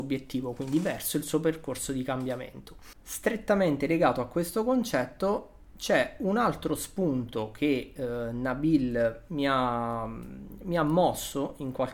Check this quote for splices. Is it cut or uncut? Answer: uncut